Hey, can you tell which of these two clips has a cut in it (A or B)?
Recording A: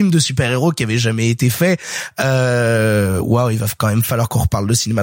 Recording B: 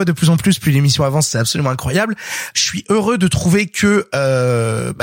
B